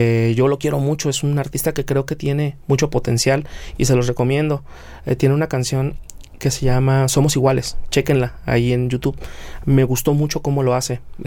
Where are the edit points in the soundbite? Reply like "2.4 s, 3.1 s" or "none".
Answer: none